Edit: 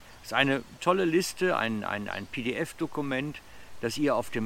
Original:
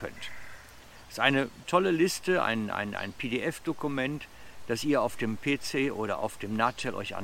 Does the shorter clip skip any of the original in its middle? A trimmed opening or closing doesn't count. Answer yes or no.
no